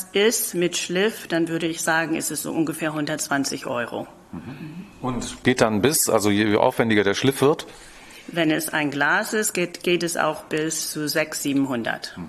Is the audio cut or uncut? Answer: cut